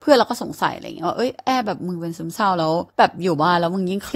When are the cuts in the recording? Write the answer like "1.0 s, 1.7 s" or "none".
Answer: 2.9 s